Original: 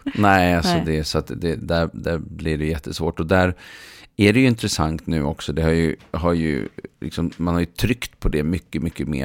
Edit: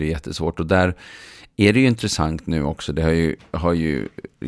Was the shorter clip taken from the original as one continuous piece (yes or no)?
yes